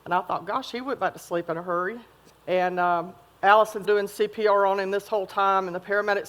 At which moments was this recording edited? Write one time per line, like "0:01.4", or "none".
0:02.3
0:03.8